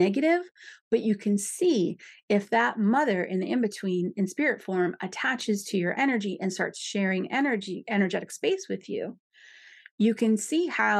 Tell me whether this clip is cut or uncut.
uncut